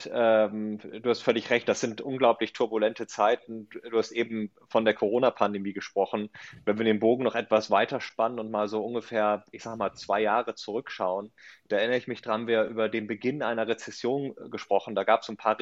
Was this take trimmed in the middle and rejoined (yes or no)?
no